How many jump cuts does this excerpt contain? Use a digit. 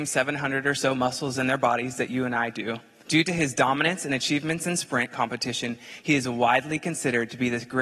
1